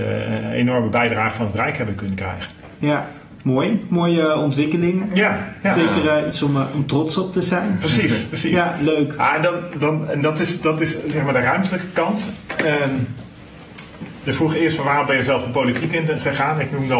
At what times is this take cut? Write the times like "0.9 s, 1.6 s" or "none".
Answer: none